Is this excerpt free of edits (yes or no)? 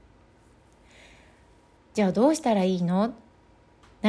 no